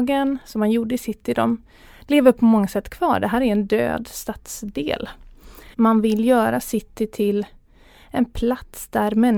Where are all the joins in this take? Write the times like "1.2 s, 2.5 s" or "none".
5.7 s